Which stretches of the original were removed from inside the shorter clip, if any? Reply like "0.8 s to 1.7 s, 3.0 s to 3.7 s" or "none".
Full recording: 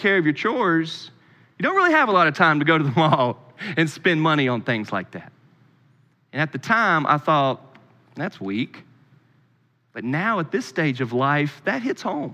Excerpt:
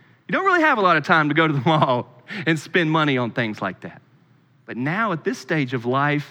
5.9 s to 9.9 s